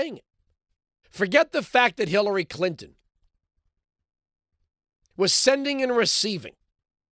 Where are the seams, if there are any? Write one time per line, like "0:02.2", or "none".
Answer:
0:01.0

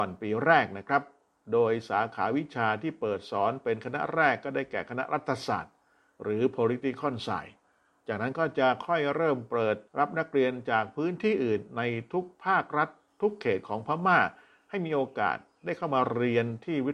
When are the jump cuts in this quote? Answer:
0:09.9

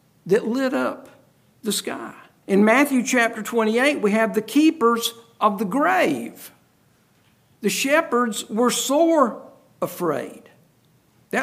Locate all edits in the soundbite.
0:02.4
0:07.5

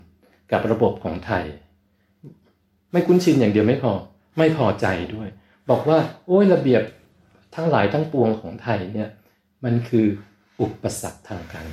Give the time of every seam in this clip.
none

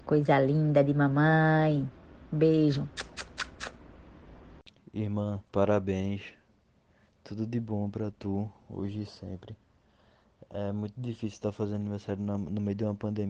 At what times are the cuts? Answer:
0:05.5

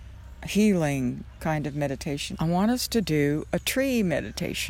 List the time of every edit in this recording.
0:02.3

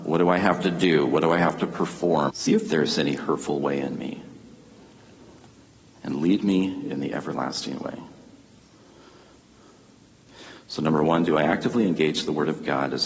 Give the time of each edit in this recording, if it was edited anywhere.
0:02.3

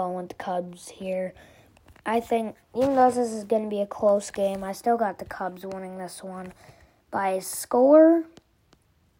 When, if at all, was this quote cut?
none

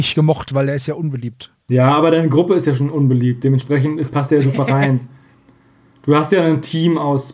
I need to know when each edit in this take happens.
0:01.6

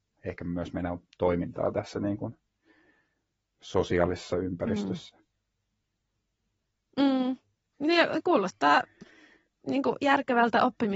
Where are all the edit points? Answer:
0:07.7

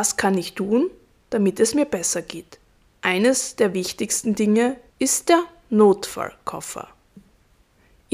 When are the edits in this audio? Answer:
0:02.9
0:04.9

